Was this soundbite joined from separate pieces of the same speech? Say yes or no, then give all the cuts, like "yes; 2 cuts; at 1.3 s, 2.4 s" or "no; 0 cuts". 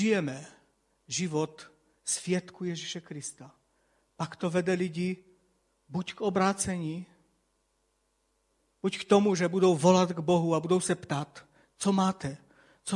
no; 0 cuts